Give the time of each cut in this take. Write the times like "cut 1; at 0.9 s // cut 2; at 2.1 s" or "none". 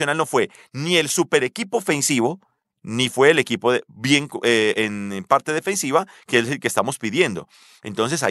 none